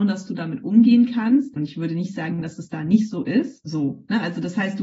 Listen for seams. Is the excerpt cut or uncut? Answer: cut